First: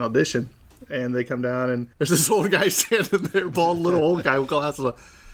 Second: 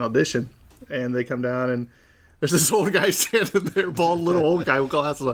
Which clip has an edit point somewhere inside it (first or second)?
first